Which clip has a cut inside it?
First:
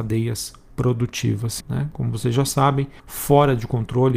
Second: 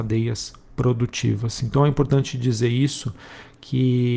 first; 2 cuts; at 1.6 s, 3.0 s

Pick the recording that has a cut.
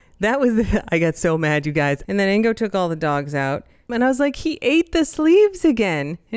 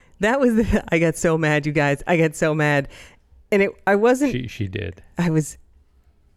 first; 2 cuts; at 2.0 s, 3.9 s

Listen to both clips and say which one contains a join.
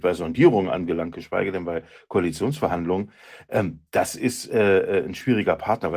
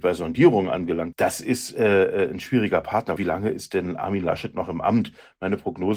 second; 2 cuts; at 1.1 s, 3.2 s

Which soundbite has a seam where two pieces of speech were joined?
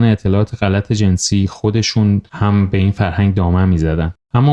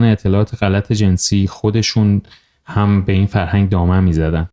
first; 1 cut; at 2.3 s

